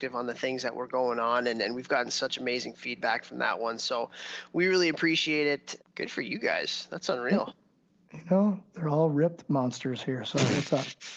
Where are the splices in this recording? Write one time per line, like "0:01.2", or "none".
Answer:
0:05.8